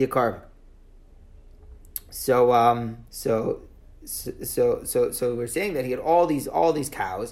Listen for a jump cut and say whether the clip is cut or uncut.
cut